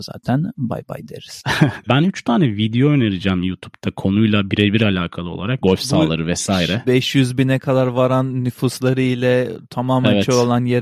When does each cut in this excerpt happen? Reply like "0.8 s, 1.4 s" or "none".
1.9 s, 5.6 s, 6.8 s